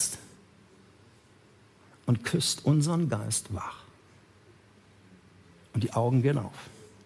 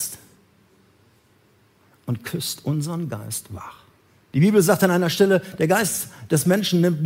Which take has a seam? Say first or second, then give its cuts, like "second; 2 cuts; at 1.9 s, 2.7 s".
second; 1 cut; at 4.3 s